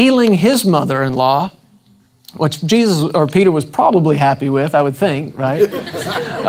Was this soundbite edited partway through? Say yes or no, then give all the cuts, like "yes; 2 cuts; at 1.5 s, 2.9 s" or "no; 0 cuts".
no; 0 cuts